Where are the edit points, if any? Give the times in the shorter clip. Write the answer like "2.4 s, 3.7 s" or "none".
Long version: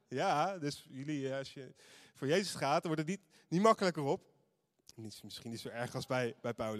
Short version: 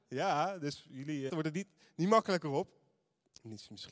1.3 s